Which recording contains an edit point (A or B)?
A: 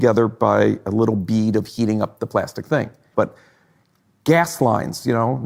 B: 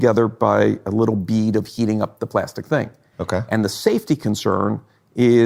A